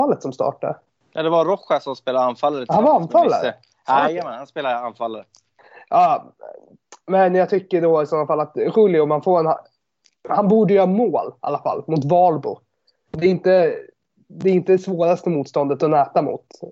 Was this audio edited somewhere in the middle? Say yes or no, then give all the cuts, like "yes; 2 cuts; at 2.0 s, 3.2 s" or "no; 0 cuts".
no; 0 cuts